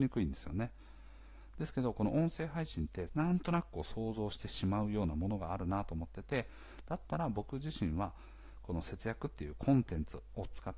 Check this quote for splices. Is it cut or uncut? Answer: cut